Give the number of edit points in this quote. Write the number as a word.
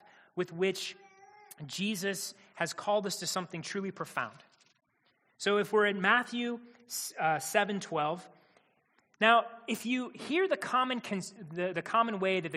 zero